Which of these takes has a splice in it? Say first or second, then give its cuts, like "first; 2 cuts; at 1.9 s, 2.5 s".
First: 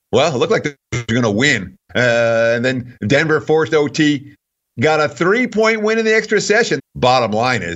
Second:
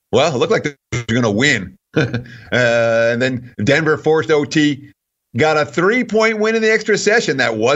first; 2 cuts; at 1.9 s, 6.8 s